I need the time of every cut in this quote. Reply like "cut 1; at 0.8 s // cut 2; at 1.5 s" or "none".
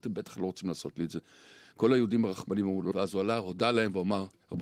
cut 1; at 2.9 s